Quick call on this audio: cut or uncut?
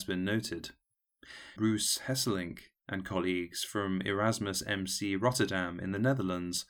cut